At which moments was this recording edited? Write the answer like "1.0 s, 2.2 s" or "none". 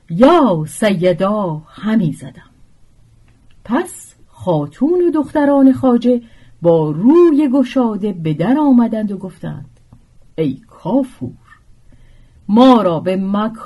4.2 s

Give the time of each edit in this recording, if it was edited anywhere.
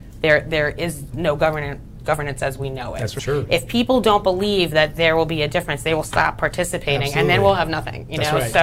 3.2 s

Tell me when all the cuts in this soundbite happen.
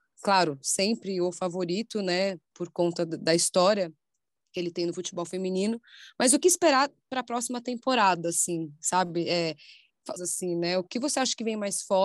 10.2 s

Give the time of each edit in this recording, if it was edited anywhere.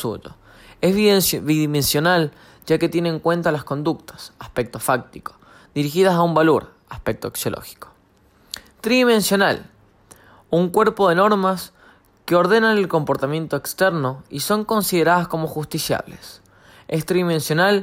none

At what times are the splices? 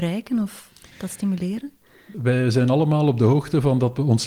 2.1 s

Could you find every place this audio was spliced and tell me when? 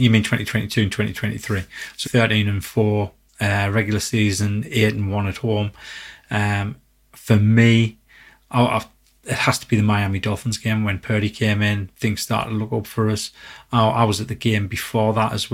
2.0 s

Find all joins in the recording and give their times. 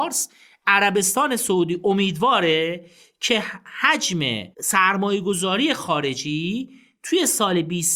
4.5 s

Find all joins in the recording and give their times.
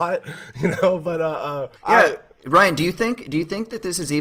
1.8 s

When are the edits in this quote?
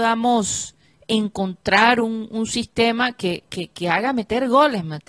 none

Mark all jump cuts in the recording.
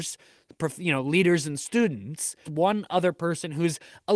2.5 s

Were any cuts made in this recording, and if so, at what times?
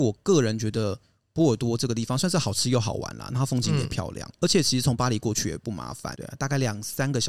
4.3 s, 6.2 s

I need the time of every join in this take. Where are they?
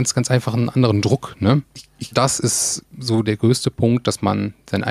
2.1 s, 3.2 s

